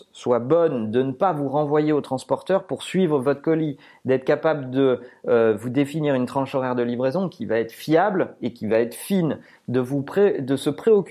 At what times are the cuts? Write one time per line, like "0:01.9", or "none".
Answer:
none